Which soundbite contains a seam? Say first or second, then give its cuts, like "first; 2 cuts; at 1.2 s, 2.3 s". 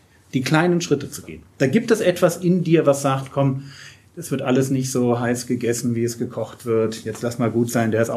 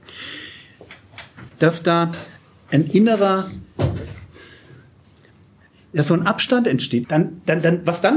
second; 2 cuts; at 1.5 s, 7.0 s